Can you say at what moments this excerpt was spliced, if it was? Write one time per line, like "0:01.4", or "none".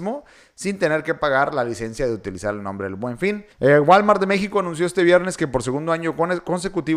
0:03.5